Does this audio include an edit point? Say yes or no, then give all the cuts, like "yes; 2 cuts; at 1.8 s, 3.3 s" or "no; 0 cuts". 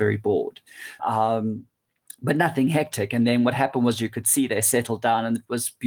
yes; 1 cut; at 1.0 s